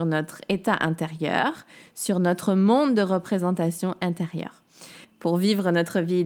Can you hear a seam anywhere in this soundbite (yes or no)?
yes